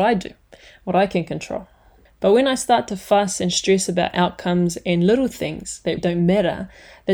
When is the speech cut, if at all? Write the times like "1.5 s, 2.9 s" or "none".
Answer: 2.1 s, 6.0 s